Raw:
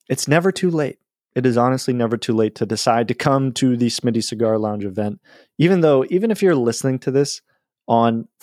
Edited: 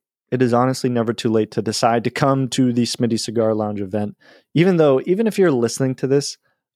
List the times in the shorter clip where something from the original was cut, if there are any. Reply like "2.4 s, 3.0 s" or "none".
none

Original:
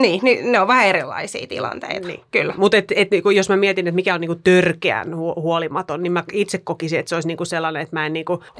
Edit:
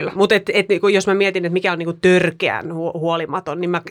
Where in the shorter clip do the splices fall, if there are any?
none

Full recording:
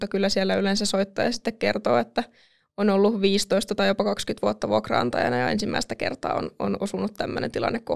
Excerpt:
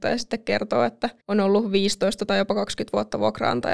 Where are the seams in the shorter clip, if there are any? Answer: 1.2 s

